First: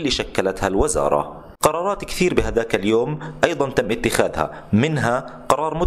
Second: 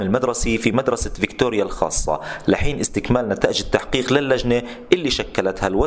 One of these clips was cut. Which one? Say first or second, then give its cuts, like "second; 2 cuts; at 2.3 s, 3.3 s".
first; 1 cut; at 1.5 s